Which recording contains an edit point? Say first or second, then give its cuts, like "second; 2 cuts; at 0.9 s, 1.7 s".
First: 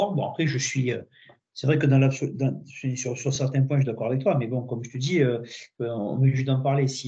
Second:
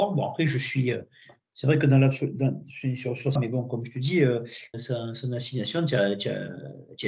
second; 2 cuts; at 3.4 s, 4.7 s